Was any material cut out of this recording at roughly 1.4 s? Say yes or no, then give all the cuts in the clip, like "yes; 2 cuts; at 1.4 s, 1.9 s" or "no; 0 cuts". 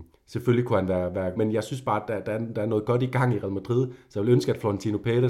yes; 1 cut; at 1.4 s